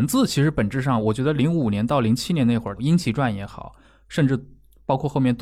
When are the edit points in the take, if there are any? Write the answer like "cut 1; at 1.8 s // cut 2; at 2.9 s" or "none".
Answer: cut 1; at 2.8 s